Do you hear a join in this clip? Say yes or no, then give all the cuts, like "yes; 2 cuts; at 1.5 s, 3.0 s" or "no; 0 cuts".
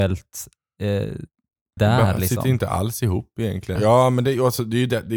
yes; 2 cuts; at 1.8 s, 3.8 s